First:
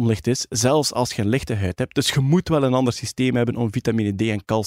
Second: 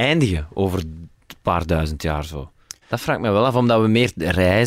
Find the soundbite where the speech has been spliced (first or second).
second